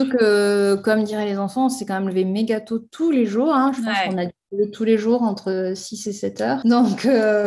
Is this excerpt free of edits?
yes; 0 cuts

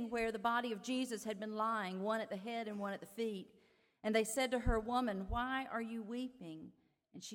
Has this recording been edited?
no; 0 cuts

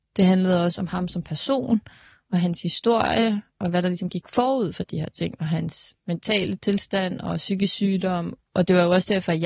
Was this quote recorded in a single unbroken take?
no; 1 cut; at 8.4 s

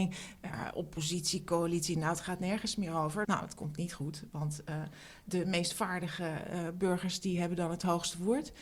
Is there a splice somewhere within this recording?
yes; 1 cut; at 3.2 s

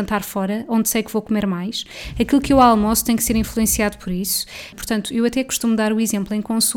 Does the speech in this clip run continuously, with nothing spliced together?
no; 1 cut; at 4.7 s

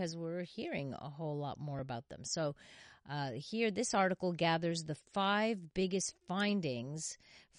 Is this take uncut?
yes; 0 cuts

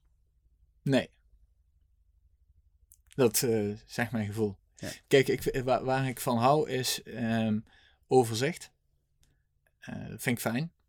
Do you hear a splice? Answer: no; 0 cuts

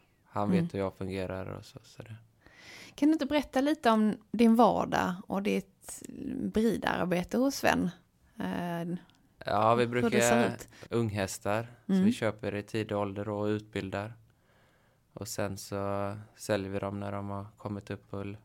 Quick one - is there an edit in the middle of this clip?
yes; 1 cut; at 10.8 s

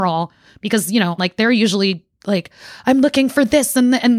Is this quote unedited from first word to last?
no; 1 cut; at 1.2 s

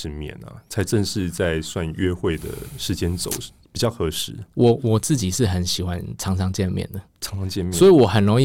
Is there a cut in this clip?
no; 0 cuts

